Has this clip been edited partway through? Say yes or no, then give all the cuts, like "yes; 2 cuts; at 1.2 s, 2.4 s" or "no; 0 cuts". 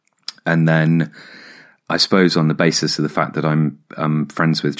no; 0 cuts